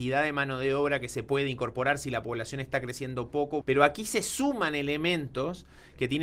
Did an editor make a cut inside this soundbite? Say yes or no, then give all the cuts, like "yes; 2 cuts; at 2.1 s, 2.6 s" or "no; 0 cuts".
yes; 1 cut; at 3.6 s